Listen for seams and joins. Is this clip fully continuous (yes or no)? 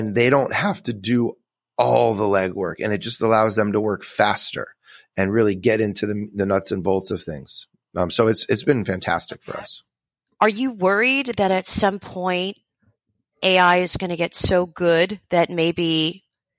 yes